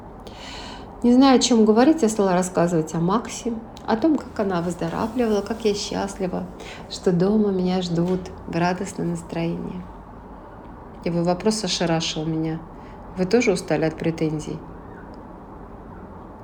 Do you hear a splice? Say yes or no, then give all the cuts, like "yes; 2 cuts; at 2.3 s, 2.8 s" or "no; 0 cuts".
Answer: yes; 1 cut; at 4.2 s